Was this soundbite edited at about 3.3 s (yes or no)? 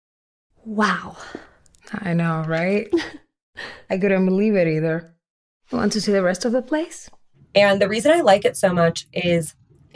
no